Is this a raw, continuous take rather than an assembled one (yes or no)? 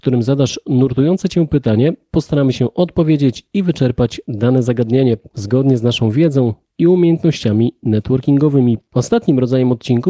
yes